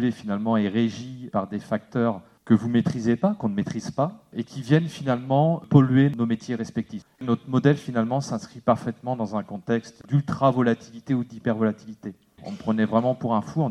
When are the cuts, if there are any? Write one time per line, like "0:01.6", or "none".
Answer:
0:07.0
0:10.0
0:12.4